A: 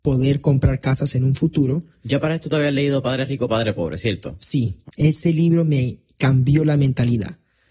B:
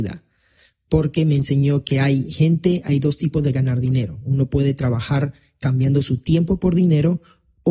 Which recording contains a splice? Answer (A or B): A